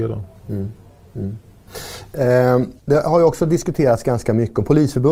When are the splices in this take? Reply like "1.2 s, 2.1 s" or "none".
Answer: 2.8 s